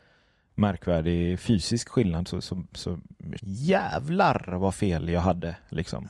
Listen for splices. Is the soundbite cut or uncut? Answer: cut